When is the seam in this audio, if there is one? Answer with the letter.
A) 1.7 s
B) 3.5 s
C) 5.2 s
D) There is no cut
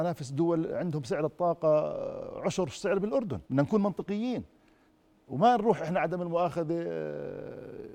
B